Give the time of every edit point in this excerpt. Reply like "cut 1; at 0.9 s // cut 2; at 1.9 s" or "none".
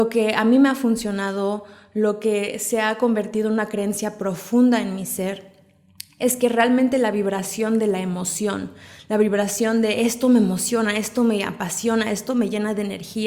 none